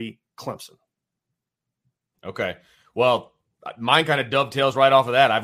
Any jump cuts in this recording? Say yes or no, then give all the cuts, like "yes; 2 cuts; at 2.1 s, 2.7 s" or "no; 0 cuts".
yes; 1 cut; at 2.1 s